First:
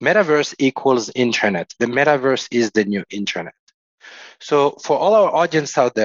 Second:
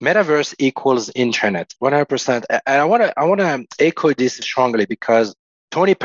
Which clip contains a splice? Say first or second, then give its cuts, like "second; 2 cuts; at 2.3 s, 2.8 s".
second; 2 cuts; at 1.8 s, 4.4 s